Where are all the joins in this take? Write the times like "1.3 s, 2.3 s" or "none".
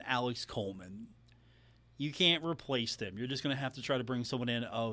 none